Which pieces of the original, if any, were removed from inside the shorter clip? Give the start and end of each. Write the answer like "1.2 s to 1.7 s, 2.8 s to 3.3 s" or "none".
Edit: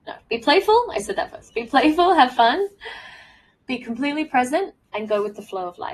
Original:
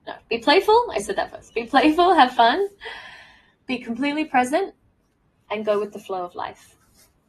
4.8 s to 5.4 s